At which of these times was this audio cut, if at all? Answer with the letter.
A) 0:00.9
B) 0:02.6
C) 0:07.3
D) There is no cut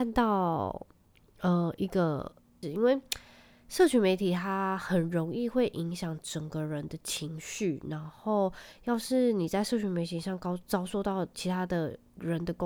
B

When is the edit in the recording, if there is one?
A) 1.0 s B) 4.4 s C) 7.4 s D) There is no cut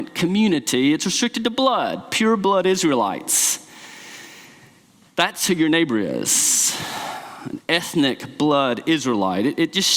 D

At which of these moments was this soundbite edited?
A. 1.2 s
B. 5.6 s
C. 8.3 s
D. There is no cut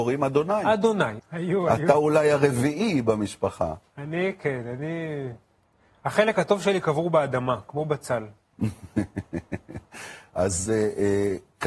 A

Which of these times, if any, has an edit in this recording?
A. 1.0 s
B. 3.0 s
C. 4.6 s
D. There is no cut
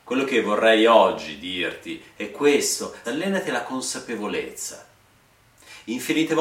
B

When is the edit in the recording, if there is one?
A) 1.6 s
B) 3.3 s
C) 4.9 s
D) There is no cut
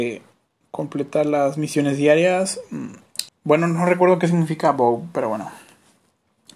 B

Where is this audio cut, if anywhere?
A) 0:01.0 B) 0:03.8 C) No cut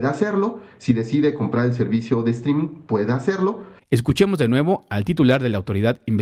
B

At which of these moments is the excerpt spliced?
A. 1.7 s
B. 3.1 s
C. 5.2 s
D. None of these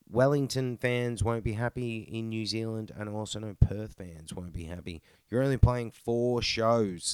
C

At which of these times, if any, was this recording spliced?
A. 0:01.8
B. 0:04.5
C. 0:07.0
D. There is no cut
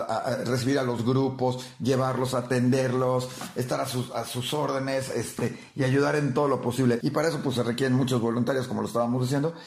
C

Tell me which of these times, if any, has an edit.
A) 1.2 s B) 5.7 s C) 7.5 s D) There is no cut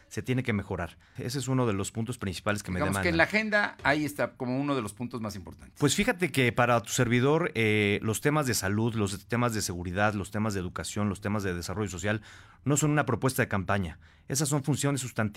A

